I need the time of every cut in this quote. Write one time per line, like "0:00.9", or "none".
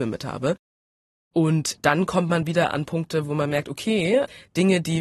0:01.3